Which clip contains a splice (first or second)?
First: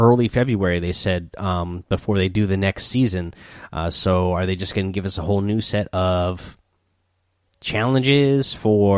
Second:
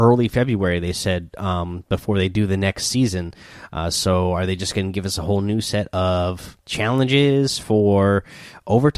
second